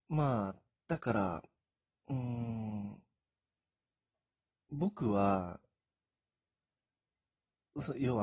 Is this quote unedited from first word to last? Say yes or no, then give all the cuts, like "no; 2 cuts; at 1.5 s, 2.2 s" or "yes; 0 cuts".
yes; 0 cuts